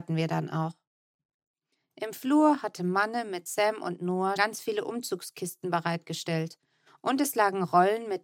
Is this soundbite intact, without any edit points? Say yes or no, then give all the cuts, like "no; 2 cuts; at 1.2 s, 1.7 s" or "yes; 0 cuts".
no; 1 cut; at 4.4 s